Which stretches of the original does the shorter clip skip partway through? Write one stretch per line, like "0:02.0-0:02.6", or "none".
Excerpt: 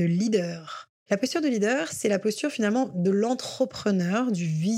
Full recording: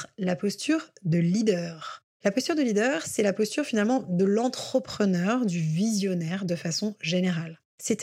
none